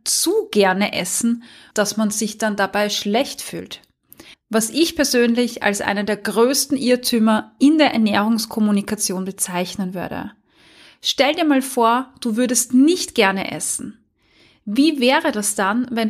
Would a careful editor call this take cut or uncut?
cut